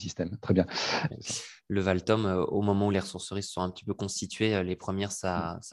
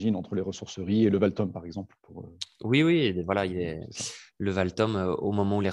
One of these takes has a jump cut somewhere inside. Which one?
first; 1 cut; at 1.1 s

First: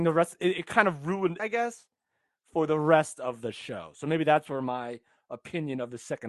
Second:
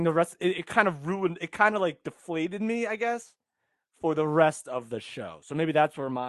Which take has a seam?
first; 1 cut; at 1.4 s

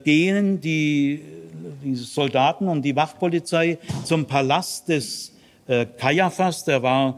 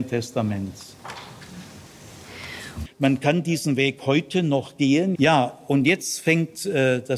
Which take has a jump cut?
second; 2 cuts; at 2.9 s, 5.1 s

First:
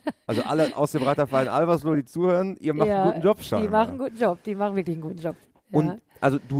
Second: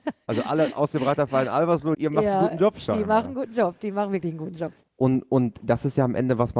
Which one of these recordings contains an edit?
second; 2 cuts; at 1.9 s, 4.8 s

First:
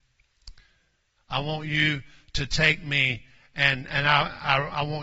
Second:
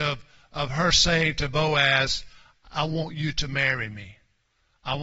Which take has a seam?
first; 1 cut; at 1.2 s

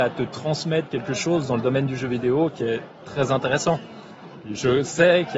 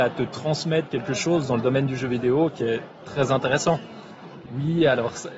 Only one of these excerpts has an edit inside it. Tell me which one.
second; 1 cut; at 4.5 s

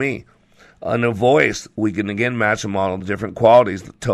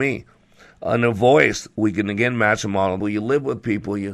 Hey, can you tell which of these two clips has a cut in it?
second; 1 cut; at 3.0 s

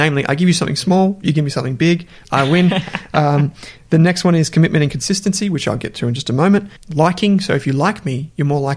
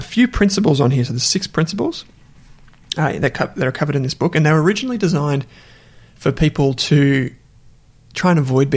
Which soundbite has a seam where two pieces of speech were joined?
first; 1 cut; at 6.8 s

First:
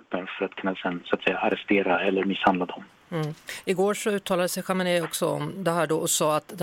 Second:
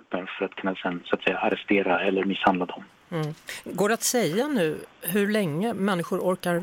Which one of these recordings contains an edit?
first; 1 cut; at 3.6 s

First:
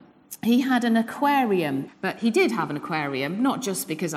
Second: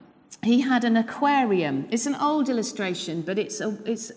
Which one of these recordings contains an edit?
first; 1 cut; at 1.9 s

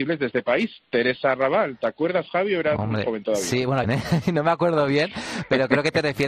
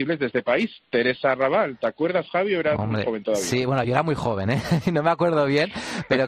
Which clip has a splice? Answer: first; 1 cut; at 3.8 s

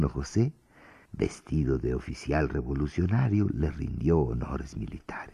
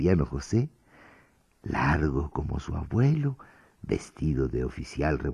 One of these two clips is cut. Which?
first; 1 cut; at 1.1 s

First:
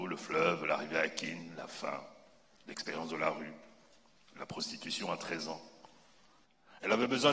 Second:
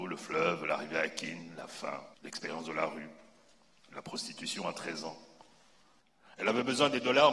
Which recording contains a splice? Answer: second; 1 cut; at 2.1 s

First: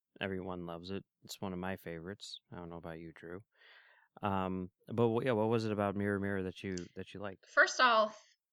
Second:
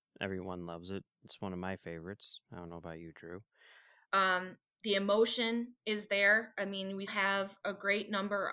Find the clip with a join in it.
second; 2 cuts; at 4.0 s, 7.1 s

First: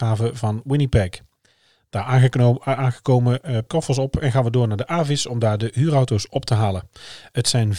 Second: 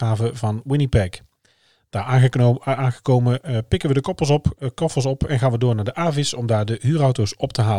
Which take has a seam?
first; 1 cut; at 3.7 s

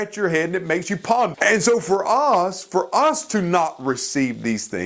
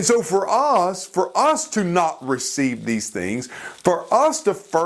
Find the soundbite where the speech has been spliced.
first; 1 cut; at 1.3 s

